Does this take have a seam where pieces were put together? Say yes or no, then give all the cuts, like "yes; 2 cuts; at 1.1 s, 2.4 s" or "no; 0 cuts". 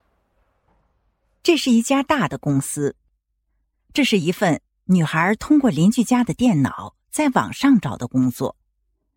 no; 0 cuts